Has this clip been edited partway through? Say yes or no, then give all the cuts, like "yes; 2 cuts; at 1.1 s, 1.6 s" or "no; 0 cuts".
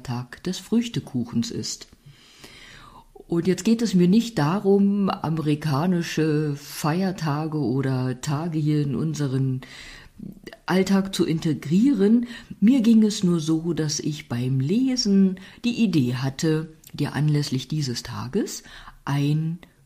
no; 0 cuts